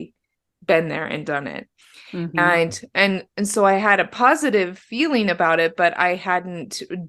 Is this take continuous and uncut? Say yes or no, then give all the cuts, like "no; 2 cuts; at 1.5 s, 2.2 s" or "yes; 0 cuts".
yes; 0 cuts